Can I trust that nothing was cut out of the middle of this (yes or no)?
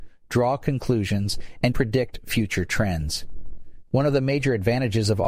no